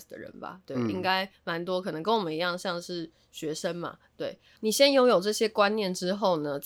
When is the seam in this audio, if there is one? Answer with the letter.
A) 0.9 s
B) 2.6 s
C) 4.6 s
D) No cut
C